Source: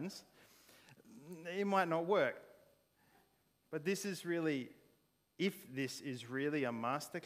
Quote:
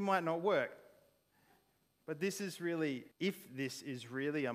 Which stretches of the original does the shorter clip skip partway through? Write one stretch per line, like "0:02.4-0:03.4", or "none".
0:04.8-0:05.3